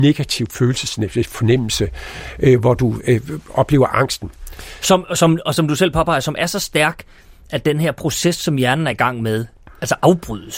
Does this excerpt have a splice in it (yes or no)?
no